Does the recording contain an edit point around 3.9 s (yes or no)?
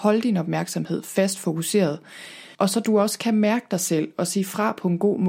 no